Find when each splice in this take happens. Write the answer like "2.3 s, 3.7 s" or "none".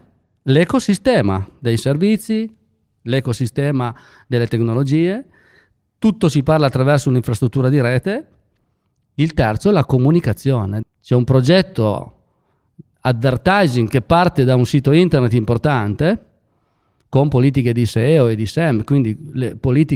10.8 s